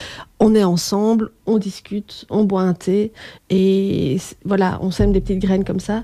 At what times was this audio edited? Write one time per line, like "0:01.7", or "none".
0:01.4
0:03.4